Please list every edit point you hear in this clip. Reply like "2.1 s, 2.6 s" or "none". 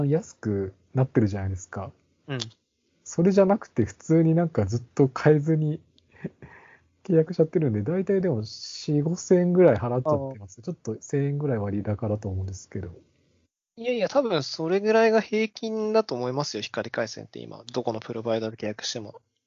none